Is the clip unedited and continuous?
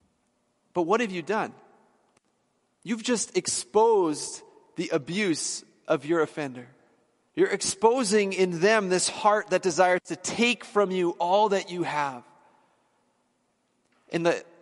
no; 1 cut; at 7.3 s

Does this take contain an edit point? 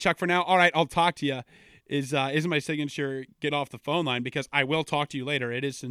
no; 0 cuts

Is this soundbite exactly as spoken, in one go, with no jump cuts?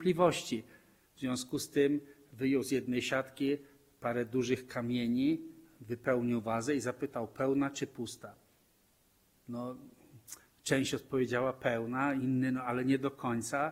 no; 1 cut; at 1.0 s

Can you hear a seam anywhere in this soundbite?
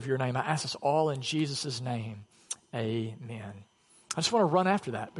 no; 0 cuts

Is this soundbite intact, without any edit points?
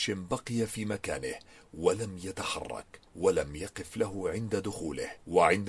no; 1 cut; at 3.1 s

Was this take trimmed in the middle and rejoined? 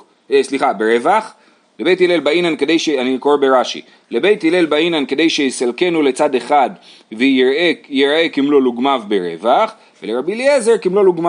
no; 0 cuts

